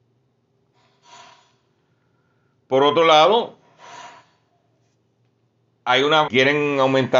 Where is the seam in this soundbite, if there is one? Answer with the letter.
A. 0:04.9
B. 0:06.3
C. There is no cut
B